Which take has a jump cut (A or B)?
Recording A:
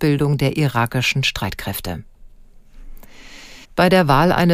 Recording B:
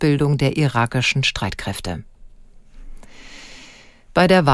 A